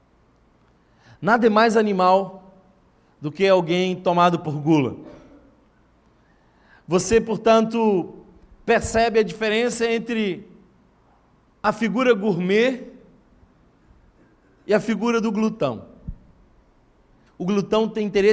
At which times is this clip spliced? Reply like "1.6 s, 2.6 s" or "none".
17.3 s